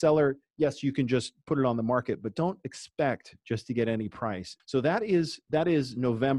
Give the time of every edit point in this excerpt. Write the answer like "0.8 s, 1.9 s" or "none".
4.6 s